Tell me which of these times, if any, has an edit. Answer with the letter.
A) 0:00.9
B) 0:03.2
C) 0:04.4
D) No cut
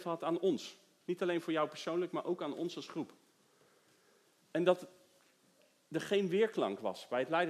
D